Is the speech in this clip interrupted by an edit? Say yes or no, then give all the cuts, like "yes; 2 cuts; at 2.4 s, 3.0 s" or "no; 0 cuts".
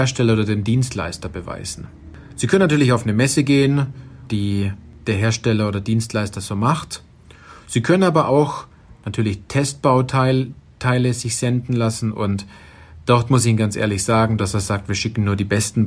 yes; 2 cuts; at 4.3 s, 14.4 s